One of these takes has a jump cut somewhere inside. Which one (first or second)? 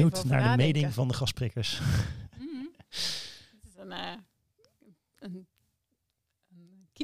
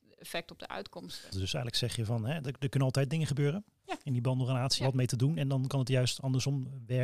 second